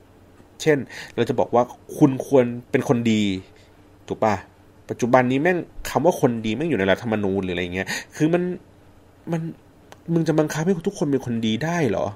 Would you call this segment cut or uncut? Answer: uncut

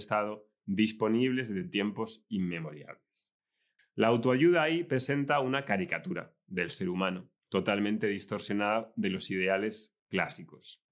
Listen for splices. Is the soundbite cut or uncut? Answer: cut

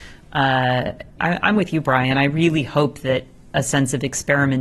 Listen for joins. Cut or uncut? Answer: cut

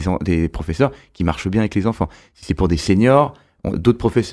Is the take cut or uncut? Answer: uncut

